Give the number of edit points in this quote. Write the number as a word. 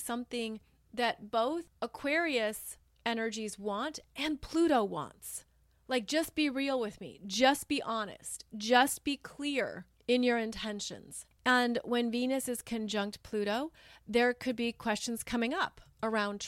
one